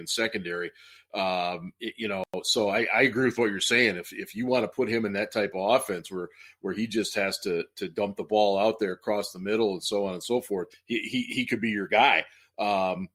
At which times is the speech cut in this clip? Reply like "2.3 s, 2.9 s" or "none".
10.7 s